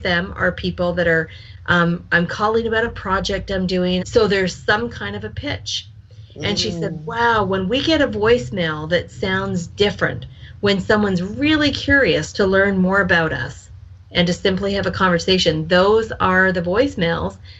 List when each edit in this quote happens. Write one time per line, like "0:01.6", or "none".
0:04.0